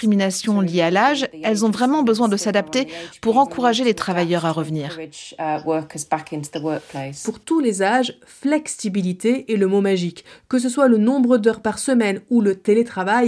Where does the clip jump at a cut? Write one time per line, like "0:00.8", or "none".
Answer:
none